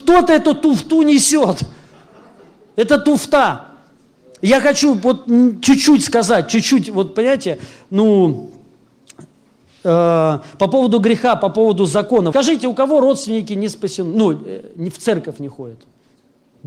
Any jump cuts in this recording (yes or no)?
yes